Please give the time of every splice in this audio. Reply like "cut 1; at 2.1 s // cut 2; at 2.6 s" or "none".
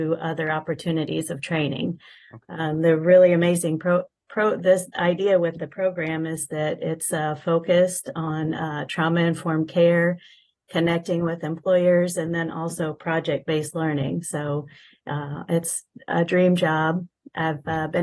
none